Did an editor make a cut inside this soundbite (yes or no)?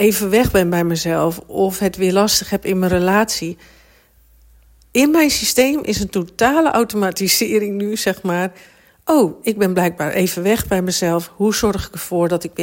no